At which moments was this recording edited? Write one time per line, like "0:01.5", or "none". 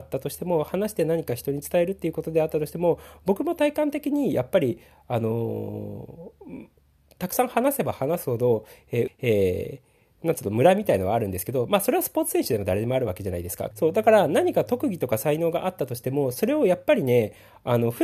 0:09.1
0:13.7